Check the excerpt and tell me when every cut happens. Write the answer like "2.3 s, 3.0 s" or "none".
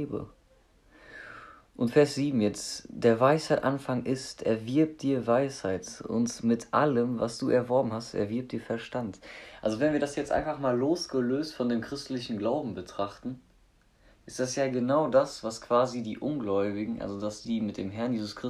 17.4 s